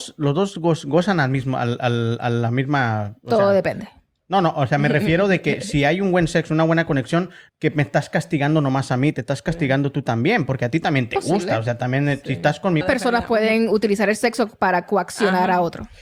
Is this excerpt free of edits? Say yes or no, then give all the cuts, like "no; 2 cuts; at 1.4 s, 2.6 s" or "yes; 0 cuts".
no; 2 cuts; at 7.5 s, 12.8 s